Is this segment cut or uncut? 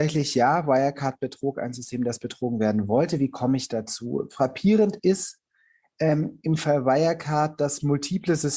uncut